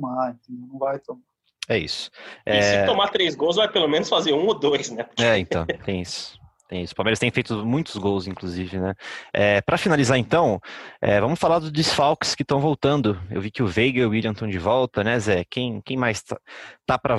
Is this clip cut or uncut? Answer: uncut